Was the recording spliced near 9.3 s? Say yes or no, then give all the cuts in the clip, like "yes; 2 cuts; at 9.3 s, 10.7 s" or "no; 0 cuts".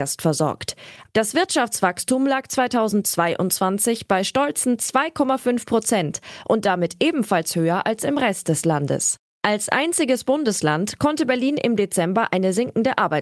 no; 1 cut; at 1.1 s